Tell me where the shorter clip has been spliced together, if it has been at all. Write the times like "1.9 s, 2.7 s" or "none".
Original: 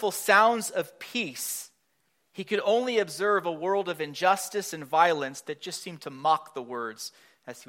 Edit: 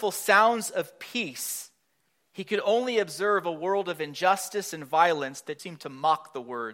5.6 s